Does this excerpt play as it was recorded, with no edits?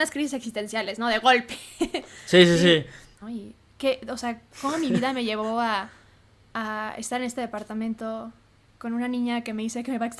no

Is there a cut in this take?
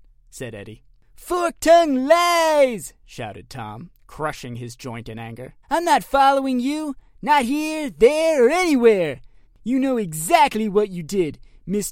yes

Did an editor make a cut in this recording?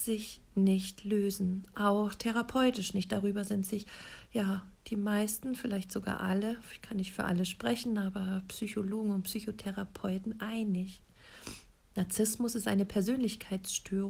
no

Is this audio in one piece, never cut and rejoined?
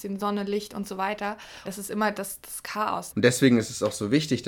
no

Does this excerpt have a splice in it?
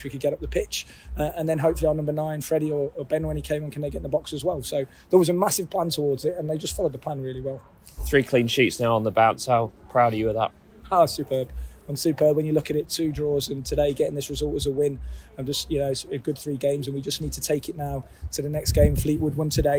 no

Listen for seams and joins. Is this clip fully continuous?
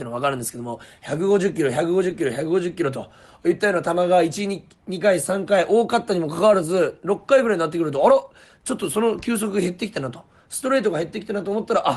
yes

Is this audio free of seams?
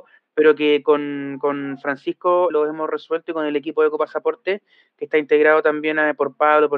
no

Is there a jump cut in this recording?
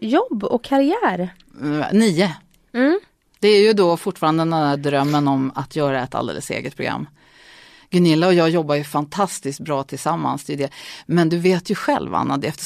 no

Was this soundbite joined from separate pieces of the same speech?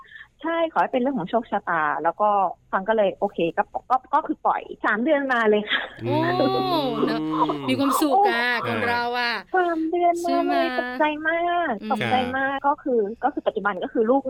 yes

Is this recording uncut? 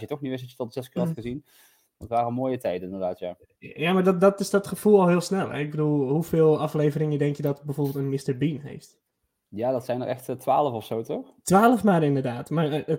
yes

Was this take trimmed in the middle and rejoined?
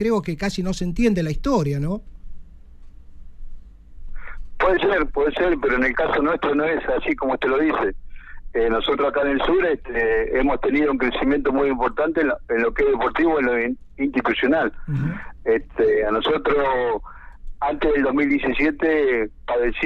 no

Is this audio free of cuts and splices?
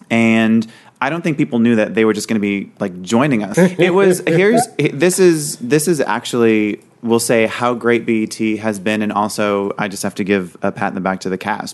no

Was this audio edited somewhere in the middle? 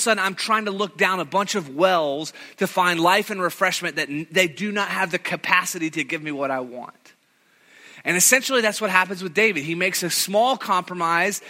no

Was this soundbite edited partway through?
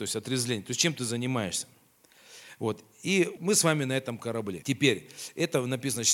yes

